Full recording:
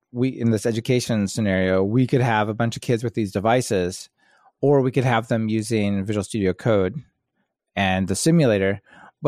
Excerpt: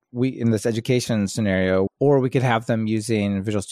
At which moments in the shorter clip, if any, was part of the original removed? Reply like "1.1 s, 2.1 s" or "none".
1.9 s